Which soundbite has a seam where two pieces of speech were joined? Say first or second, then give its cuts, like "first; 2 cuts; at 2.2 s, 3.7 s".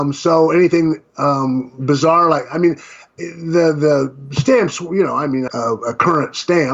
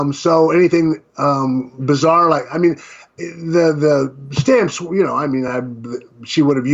first; 1 cut; at 5.5 s